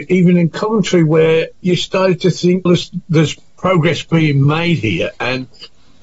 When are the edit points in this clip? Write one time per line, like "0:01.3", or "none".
0:02.7